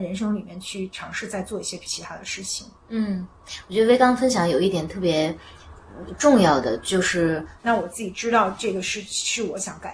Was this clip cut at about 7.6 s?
yes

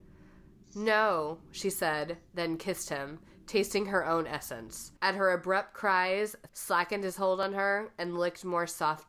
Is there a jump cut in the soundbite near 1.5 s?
no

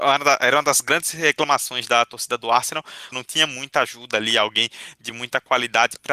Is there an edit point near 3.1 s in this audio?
yes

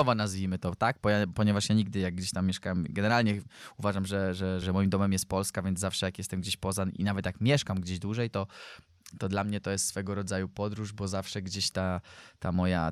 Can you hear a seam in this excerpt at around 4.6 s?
yes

